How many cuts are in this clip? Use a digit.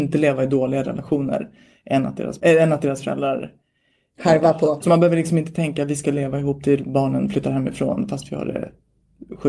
2